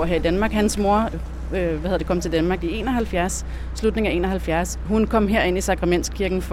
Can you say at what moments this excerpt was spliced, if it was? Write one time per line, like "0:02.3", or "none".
0:01.1
0:04.9